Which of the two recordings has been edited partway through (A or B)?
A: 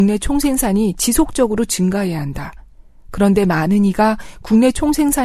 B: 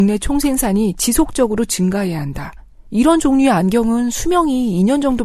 B